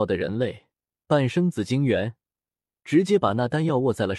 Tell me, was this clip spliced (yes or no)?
yes